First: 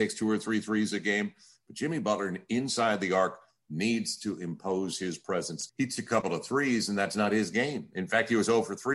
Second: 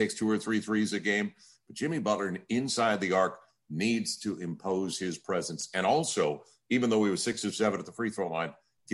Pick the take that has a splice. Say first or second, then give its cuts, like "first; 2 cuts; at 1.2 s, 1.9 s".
first; 1 cut; at 5.7 s